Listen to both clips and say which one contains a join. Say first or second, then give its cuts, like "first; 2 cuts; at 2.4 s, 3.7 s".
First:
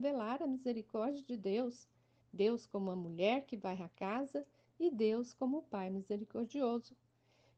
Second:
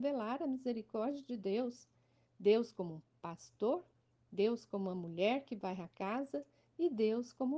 first; 1 cut; at 2.2 s